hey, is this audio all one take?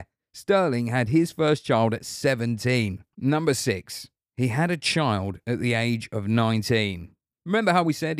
no; 1 cut; at 3.1 s

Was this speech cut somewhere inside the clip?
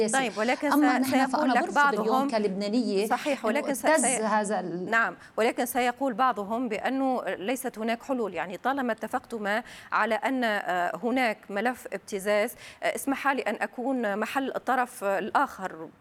no; 0 cuts

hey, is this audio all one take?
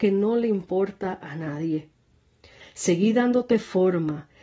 no; 1 cut; at 2.6 s

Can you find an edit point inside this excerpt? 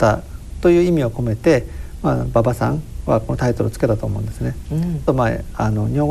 yes; 1 cut; at 5.1 s

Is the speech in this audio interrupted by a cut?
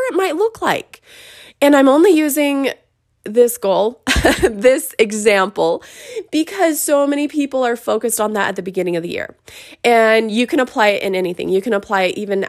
no; 0 cuts

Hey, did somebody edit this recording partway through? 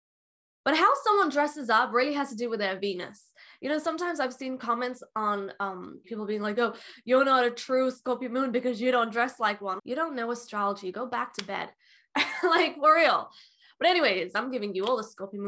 yes; 2 cuts; at 6.0 s, 9.8 s

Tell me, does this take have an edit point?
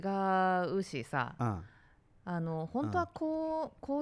no; 0 cuts

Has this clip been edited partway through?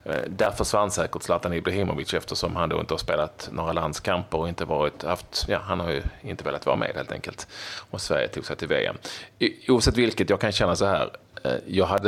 no; 0 cuts

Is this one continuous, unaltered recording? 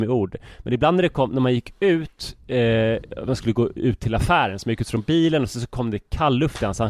yes; 0 cuts

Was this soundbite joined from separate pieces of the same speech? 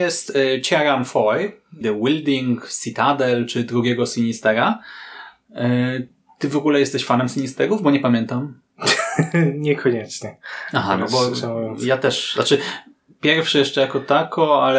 yes; 1 cut; at 1.8 s

